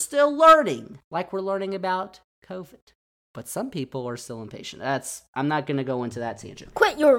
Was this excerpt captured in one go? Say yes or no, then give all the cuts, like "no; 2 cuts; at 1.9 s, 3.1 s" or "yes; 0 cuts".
yes; 0 cuts